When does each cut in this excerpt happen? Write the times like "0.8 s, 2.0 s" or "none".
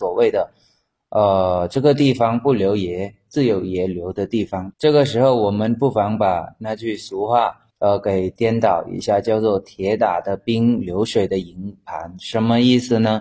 4.7 s, 7.7 s